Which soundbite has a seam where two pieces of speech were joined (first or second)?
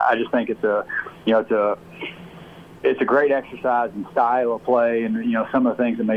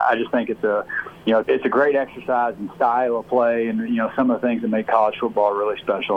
second